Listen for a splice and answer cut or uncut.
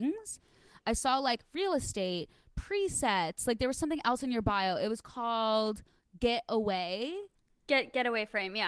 uncut